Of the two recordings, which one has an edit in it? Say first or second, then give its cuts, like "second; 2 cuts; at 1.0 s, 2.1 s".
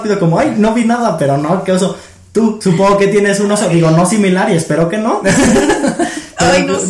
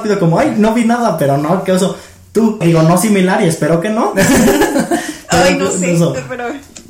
second; 1 cut; at 2.6 s